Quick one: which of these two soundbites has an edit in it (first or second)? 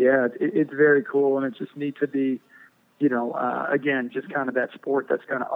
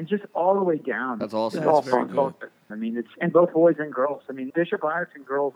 second